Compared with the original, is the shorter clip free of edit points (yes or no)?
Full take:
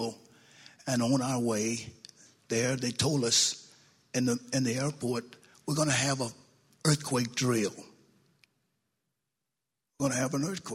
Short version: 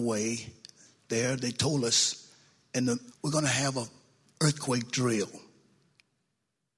no